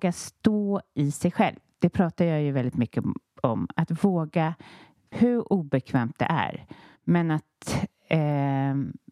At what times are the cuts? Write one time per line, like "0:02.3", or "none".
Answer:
0:05.1
0:07.0